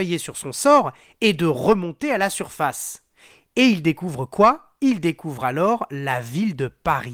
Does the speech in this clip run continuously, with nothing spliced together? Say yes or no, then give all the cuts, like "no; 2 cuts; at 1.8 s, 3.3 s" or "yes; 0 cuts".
yes; 0 cuts